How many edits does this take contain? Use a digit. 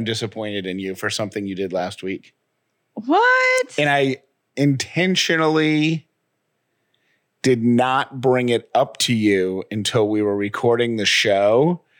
0